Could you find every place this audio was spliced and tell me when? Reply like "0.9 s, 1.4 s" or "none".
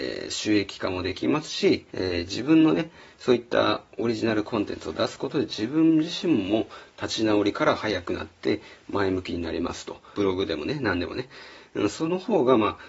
1.9 s, 10.1 s